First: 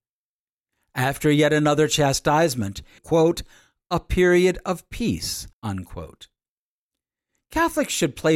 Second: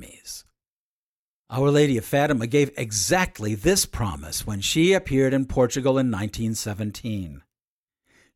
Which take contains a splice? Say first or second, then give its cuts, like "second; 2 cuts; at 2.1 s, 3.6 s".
first; 2 cuts; at 3.0 s, 5.5 s